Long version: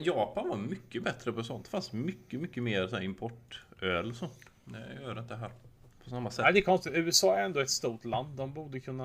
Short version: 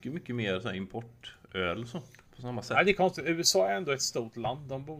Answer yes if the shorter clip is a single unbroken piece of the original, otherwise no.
no